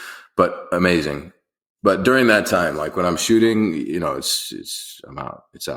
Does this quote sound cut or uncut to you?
uncut